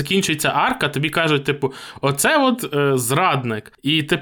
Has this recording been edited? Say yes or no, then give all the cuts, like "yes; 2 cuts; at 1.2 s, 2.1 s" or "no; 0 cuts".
no; 0 cuts